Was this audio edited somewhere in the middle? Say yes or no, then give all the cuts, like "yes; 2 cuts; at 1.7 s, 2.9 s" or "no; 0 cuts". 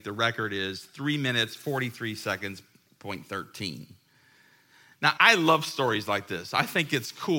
yes; 1 cut; at 5.2 s